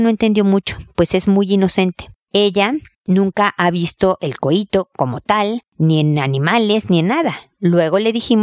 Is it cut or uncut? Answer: uncut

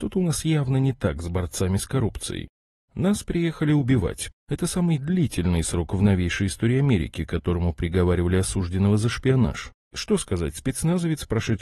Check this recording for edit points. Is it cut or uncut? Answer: cut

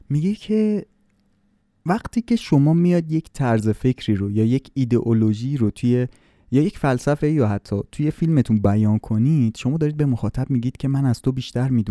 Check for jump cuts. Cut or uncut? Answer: uncut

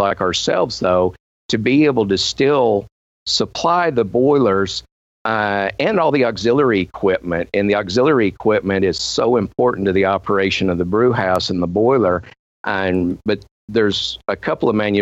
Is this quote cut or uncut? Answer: uncut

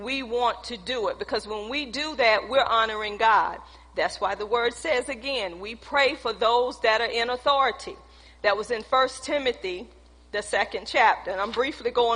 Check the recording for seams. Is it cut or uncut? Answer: uncut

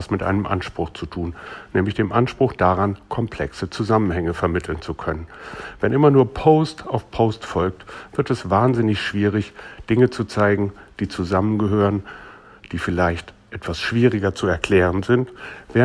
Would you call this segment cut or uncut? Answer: uncut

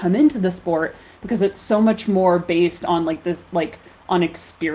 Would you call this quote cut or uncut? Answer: uncut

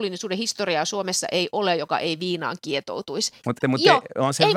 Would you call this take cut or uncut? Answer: cut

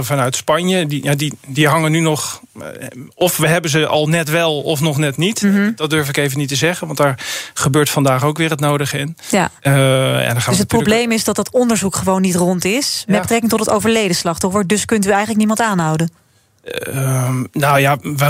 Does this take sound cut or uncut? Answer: cut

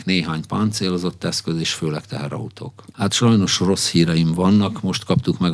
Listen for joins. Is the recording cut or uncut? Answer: cut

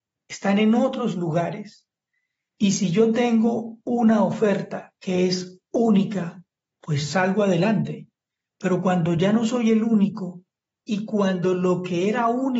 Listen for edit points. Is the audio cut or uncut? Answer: uncut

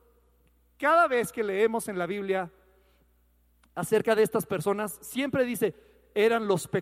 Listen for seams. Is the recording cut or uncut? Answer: uncut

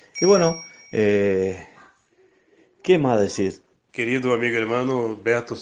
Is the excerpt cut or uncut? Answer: cut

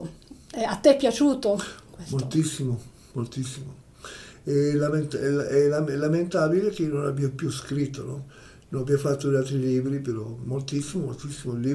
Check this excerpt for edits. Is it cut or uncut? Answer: uncut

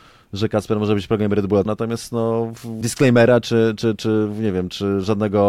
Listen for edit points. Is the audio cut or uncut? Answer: cut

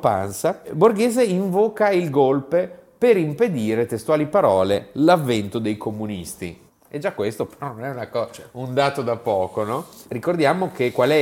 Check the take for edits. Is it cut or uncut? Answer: cut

